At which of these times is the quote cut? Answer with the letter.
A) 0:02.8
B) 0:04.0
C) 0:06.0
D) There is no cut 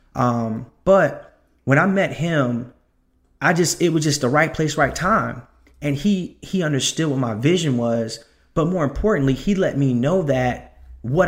D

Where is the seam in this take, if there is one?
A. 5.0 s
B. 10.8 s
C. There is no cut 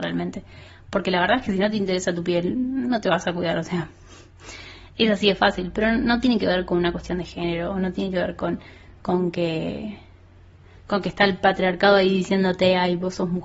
C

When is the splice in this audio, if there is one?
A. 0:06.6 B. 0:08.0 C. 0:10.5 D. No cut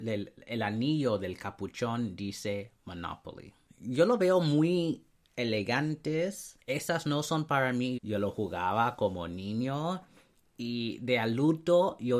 B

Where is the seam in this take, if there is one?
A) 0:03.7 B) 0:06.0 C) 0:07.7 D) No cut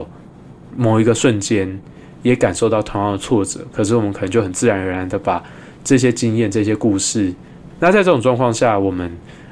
C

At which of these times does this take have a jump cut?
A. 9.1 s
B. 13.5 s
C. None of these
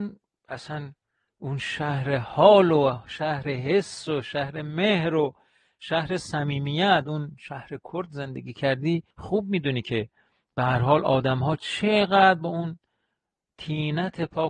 A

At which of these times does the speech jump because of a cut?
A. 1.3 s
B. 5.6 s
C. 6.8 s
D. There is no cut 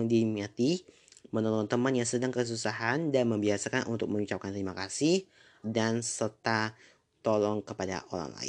B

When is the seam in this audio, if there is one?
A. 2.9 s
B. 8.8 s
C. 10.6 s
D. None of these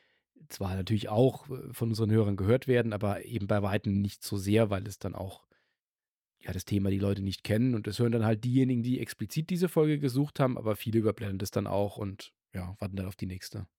B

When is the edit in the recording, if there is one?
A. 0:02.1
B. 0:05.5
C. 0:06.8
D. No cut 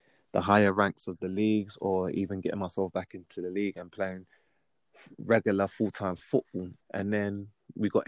C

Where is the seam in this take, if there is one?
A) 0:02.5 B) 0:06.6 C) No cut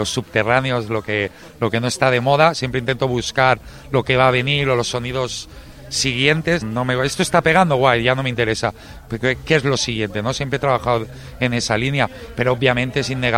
B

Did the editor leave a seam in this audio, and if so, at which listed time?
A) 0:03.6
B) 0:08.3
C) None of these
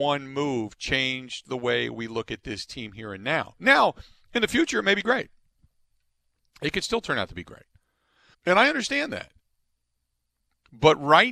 B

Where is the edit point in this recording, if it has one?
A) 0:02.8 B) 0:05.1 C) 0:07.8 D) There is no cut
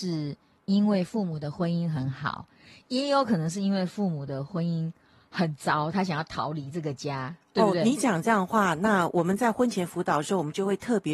D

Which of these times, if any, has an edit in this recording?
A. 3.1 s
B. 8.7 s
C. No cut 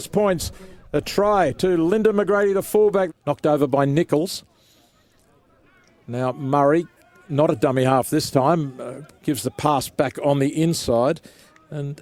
A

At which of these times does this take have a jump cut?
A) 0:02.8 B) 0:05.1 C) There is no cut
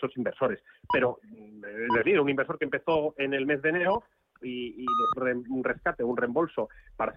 B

